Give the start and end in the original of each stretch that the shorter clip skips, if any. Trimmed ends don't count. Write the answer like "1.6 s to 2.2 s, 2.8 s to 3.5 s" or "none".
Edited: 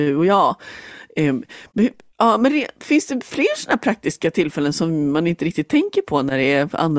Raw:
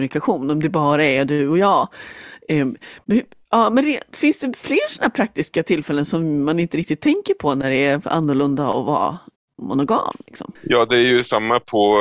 none

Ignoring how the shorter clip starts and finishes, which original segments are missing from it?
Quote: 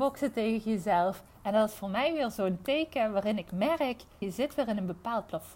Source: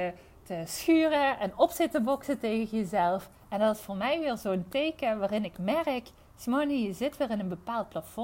6.3 s to 6.8 s

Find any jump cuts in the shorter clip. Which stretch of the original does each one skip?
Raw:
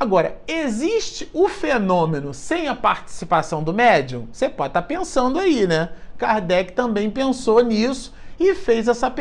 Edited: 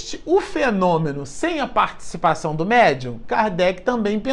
4.3 s to 6.1 s

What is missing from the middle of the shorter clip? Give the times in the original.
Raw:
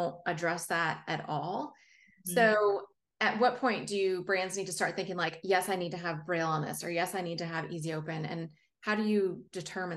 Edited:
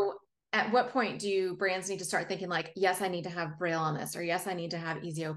none

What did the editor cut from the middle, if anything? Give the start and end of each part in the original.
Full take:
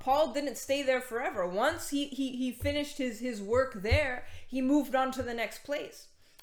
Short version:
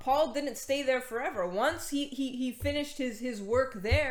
none

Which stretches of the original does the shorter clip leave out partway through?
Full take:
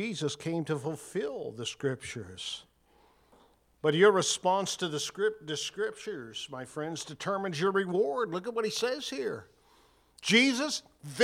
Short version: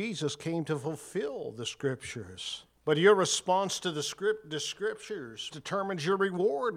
2.7 s to 3.7 s, 6.5 s to 7.0 s

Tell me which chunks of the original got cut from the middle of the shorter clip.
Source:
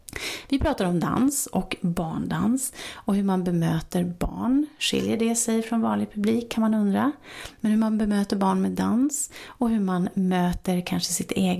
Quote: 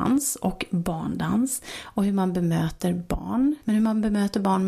4.7 s to 7.6 s

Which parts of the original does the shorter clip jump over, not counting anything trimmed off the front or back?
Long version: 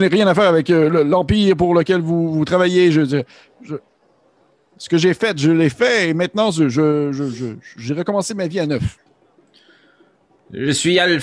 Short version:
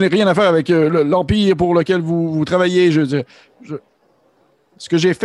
none

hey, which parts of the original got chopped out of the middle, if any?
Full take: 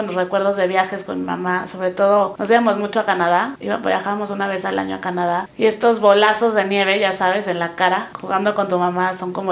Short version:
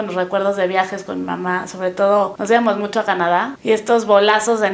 3.6 s to 5.5 s

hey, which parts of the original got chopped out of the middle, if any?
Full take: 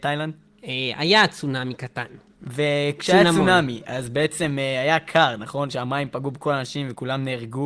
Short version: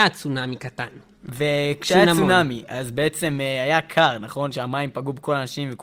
none

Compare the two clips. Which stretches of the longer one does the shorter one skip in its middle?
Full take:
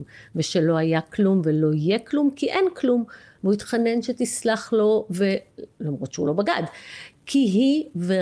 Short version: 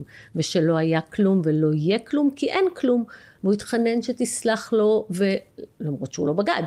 none

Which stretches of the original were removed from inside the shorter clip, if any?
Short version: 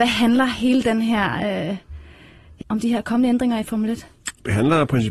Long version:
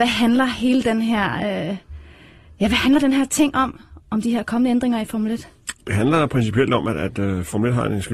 2.6 s to 4.0 s

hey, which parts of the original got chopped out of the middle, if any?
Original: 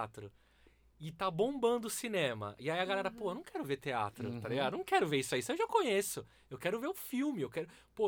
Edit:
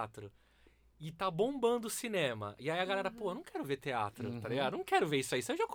none

